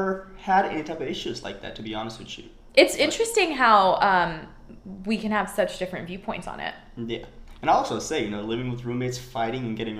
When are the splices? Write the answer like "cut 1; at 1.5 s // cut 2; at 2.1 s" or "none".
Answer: none